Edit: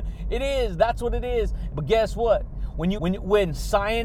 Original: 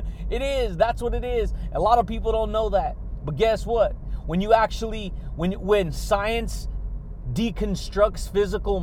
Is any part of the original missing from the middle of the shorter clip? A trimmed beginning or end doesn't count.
yes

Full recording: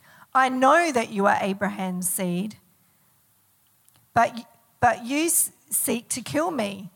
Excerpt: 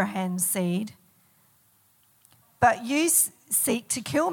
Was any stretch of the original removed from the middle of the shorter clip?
yes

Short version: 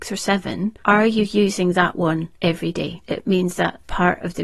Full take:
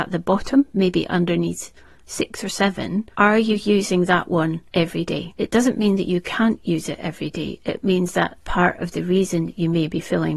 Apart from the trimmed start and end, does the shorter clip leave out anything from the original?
yes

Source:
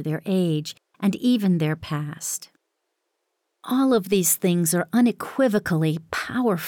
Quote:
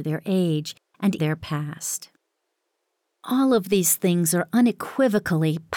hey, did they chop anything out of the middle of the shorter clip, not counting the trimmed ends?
yes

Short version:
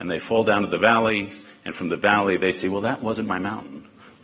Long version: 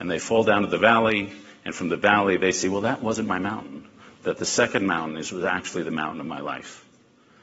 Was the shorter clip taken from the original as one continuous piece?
yes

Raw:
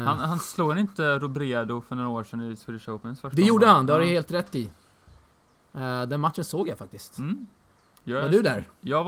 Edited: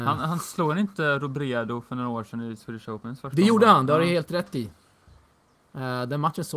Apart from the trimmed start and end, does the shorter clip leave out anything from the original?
no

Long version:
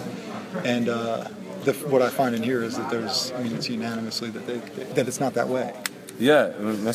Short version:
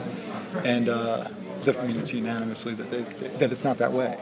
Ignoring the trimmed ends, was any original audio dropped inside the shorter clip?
yes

